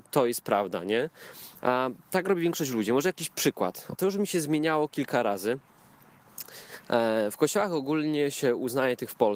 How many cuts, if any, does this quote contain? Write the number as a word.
one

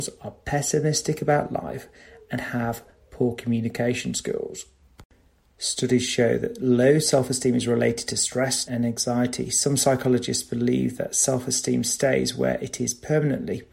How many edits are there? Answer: one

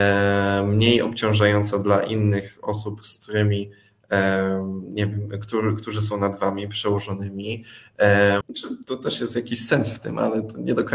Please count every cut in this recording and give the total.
one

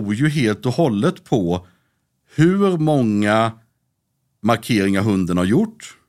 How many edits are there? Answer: one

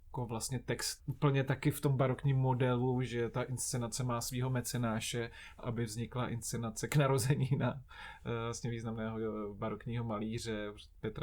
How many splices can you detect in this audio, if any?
two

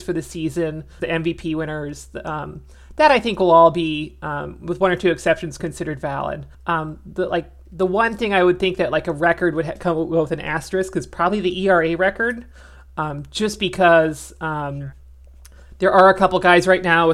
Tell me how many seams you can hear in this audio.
two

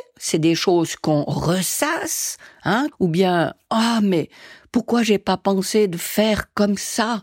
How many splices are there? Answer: one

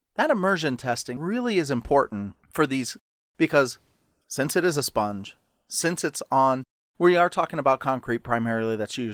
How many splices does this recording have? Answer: two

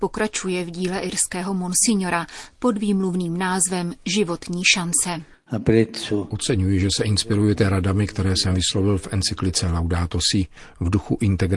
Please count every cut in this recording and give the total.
zero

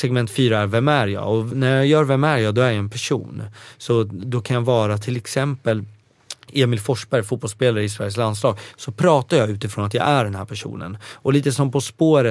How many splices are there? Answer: zero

